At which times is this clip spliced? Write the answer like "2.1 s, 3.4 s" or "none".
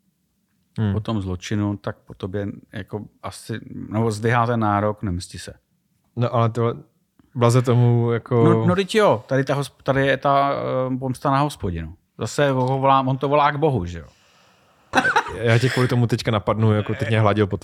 14.9 s